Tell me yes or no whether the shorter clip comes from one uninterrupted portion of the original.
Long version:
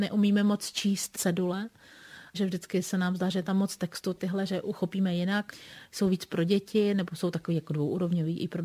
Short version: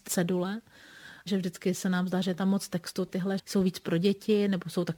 no